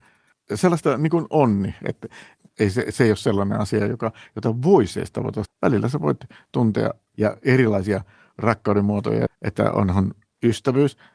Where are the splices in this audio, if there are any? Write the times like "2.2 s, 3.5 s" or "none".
5.5 s, 9.3 s